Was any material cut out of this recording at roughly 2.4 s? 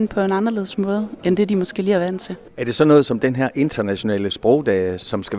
no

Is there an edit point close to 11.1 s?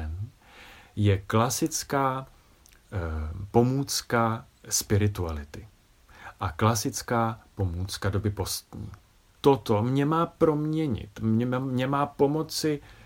no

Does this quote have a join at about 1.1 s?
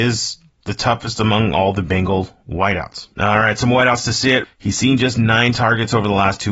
no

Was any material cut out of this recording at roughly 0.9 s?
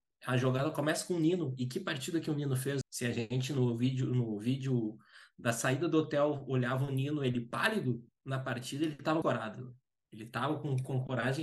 no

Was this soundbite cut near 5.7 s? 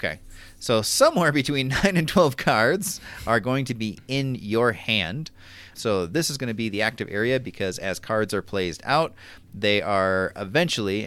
yes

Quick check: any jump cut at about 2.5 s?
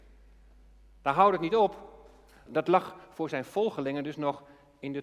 yes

